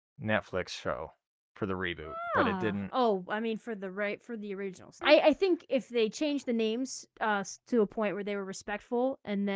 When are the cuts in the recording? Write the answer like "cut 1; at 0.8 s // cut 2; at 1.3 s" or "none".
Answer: cut 1; at 5.0 s